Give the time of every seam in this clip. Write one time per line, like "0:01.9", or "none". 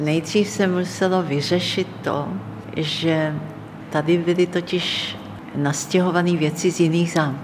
none